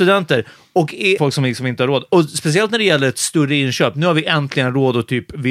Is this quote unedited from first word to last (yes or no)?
no